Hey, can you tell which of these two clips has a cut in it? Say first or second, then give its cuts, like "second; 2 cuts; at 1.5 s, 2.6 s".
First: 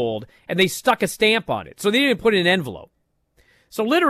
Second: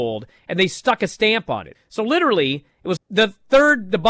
second; 2 cuts; at 1.7 s, 3.0 s